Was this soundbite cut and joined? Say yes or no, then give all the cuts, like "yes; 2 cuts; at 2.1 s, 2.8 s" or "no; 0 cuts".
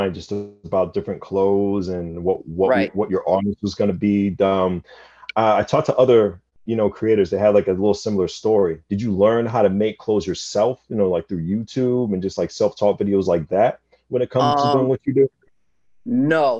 no; 0 cuts